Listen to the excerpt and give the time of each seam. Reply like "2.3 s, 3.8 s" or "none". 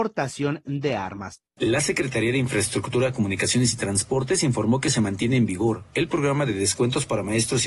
1.5 s